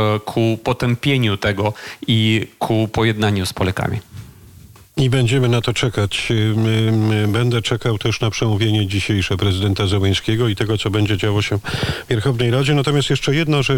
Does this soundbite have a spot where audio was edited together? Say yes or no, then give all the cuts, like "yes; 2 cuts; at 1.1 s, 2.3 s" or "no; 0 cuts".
no; 0 cuts